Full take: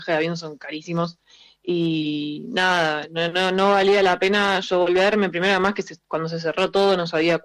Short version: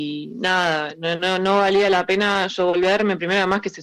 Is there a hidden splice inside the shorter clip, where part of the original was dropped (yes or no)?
no